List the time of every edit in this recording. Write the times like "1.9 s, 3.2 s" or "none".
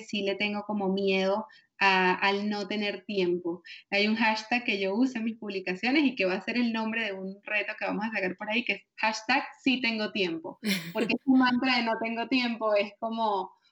5.1 s